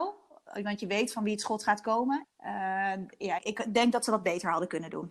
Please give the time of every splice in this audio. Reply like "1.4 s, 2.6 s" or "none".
2.2 s, 3.4 s